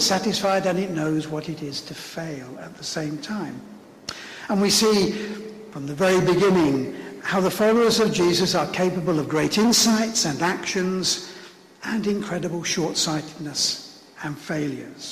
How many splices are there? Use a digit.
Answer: 0